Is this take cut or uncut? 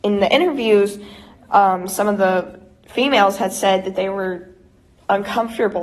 uncut